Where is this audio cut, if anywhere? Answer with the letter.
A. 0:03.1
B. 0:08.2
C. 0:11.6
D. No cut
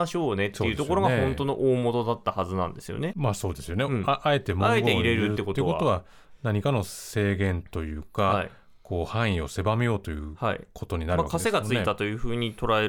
A